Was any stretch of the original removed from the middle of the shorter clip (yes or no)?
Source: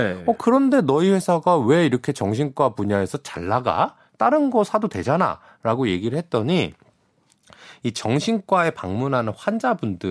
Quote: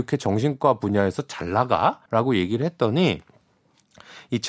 yes